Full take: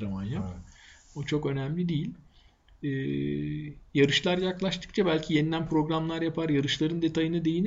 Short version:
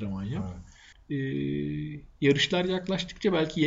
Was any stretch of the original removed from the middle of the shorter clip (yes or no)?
yes